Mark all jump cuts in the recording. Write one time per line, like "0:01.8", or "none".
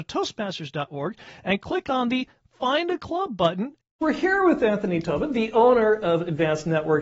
0:03.8

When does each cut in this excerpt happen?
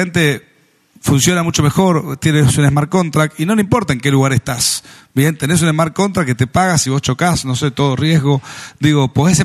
none

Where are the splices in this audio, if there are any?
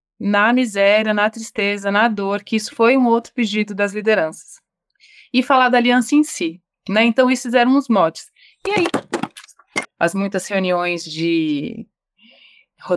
0:09.8

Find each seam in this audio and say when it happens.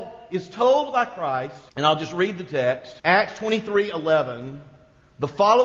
0:01.7
0:03.0

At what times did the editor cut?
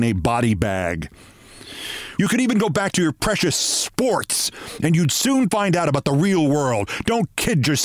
0:02.2

